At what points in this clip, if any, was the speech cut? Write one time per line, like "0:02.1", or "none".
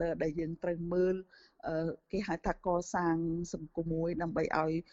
0:03.9